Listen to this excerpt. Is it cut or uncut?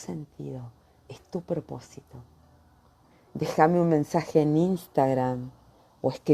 cut